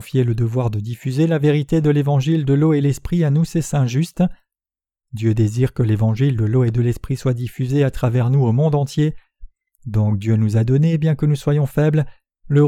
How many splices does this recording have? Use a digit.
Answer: 0